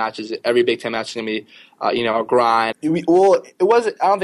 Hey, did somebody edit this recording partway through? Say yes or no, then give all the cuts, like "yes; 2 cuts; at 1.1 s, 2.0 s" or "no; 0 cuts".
yes; 1 cut; at 2.7 s